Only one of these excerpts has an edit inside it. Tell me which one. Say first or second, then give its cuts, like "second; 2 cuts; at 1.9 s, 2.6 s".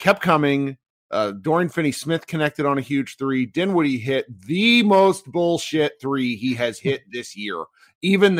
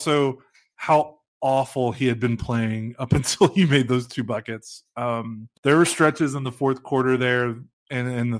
second; 1 cut; at 5.6 s